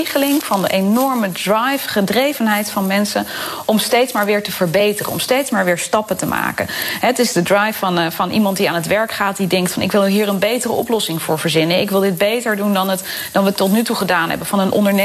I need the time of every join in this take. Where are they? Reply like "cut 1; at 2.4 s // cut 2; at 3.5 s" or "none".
none

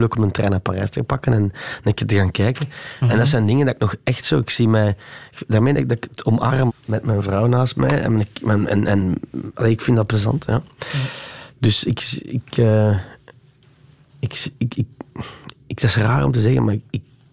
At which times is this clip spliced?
cut 1; at 6.7 s

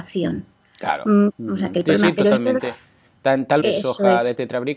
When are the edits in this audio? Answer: cut 1; at 1.3 s // cut 2; at 3.6 s

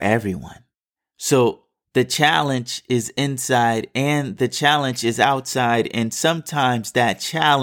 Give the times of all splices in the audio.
none

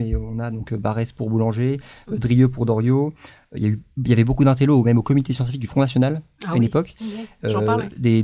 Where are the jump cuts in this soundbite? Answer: none

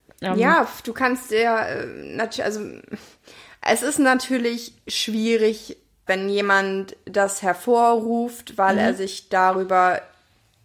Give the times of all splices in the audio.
cut 1; at 6.1 s

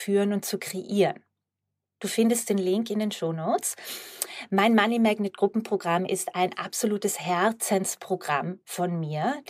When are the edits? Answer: cut 1; at 2.0 s

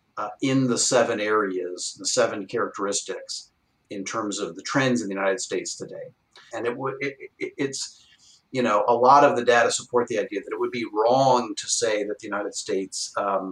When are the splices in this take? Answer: cut 1; at 6.5 s

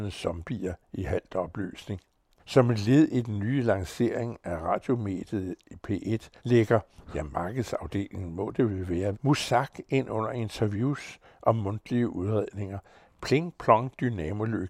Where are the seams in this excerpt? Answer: cut 1; at 2.4 s // cut 2; at 6.4 s // cut 3; at 9.1 s

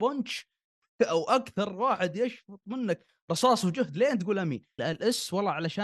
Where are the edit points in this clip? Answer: cut 1; at 4.8 s

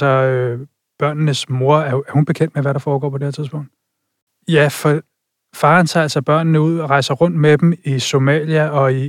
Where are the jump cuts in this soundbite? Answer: cut 1; at 4.3 s // cut 2; at 7.8 s

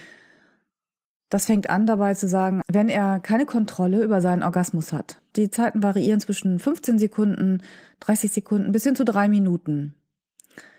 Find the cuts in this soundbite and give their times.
cut 1; at 2.6 s // cut 2; at 5.3 s

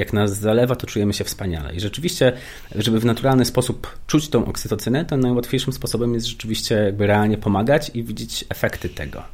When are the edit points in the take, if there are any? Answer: none

